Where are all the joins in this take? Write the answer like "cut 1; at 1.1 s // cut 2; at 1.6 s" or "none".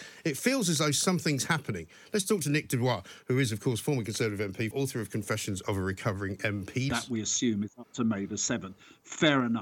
cut 1; at 4.7 s // cut 2; at 6.9 s